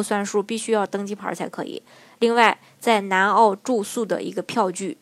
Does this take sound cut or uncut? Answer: uncut